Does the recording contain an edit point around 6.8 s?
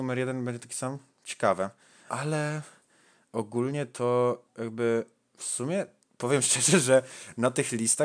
no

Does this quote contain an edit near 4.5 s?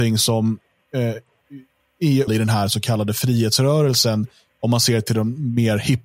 no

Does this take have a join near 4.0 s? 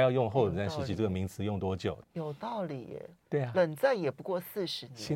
no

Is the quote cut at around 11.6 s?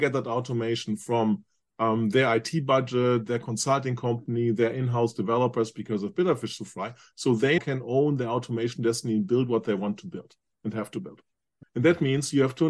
yes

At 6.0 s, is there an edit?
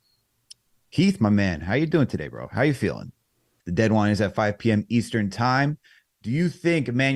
yes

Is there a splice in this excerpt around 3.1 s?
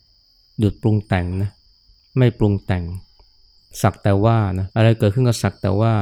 no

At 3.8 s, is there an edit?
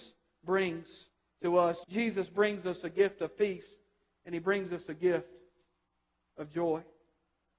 no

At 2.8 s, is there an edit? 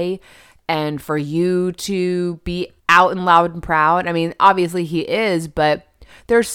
yes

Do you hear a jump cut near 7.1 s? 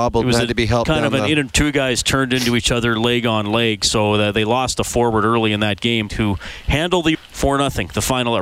yes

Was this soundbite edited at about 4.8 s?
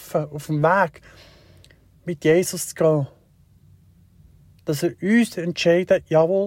no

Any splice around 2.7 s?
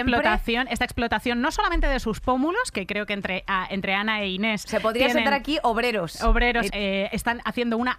no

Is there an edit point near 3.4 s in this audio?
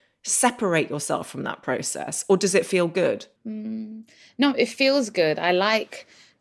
yes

